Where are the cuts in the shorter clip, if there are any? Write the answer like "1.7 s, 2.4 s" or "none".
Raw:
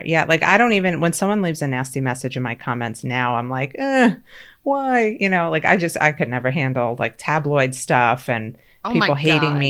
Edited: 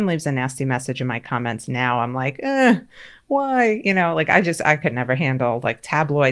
none

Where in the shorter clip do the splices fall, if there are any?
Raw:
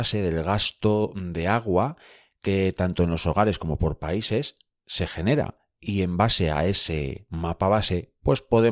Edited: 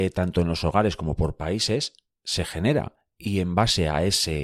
none

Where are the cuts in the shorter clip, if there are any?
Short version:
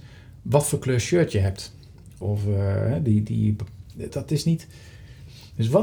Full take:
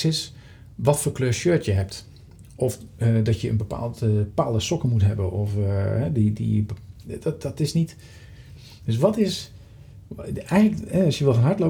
2.2 s, 4.1 s

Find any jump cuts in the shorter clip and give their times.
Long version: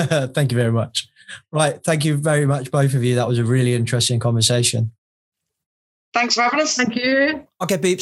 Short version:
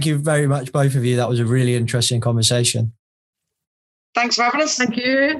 none

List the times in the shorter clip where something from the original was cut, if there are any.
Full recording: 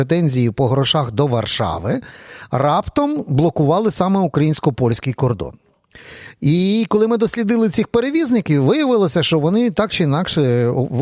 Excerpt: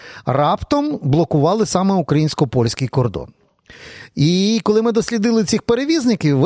none

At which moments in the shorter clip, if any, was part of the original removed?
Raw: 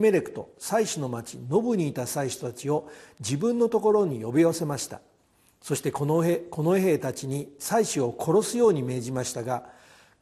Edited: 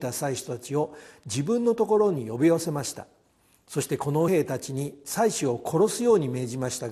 4.3 s

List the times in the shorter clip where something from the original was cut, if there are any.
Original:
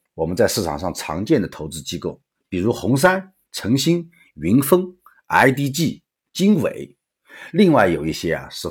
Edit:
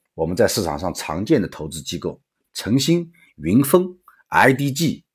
2.4 s

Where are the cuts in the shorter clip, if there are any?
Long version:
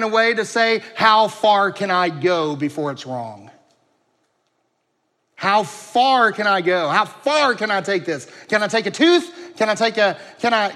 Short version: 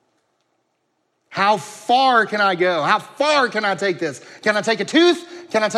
none

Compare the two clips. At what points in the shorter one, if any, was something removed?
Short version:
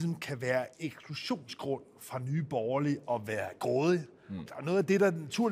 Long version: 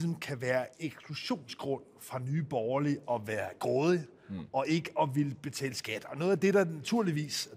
4.5 s

